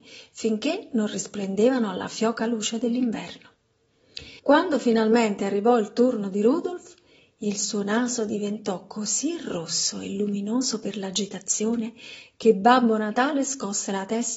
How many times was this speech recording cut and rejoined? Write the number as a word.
one